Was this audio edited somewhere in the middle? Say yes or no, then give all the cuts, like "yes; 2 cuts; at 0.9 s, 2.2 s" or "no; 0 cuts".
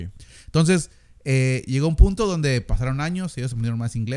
no; 0 cuts